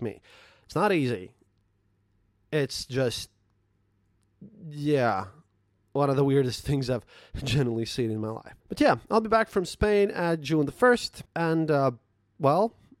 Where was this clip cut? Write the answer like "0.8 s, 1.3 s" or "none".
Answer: 8.6 s, 11.2 s